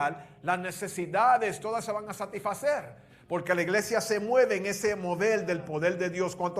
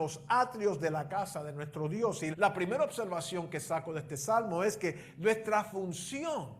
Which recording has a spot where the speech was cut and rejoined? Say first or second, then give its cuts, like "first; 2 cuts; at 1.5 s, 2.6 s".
second; 1 cut; at 2.3 s